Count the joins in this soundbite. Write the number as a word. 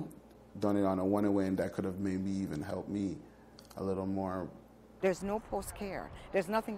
one